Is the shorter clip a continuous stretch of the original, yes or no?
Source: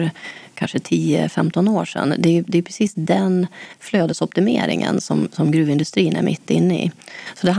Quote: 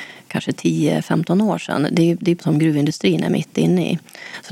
no